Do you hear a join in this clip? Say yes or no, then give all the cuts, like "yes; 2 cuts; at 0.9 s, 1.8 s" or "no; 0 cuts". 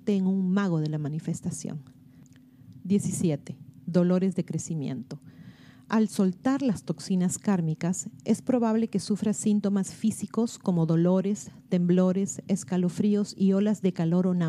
no; 0 cuts